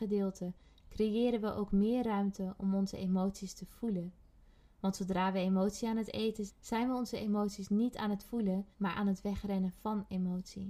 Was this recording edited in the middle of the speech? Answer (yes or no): yes